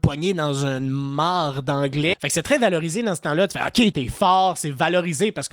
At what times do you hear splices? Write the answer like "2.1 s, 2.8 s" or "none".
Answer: 2.1 s, 3.9 s